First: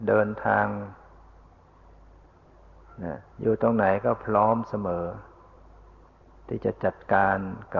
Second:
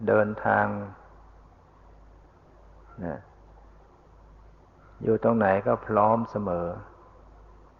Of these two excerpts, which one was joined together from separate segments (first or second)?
first